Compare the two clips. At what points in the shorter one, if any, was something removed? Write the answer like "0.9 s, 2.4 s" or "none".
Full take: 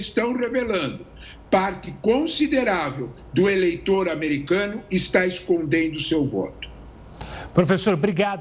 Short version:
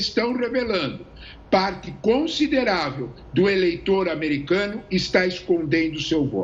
none